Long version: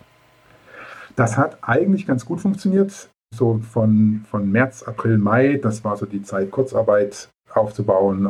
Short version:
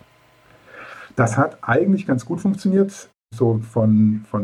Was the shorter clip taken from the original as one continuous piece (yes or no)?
yes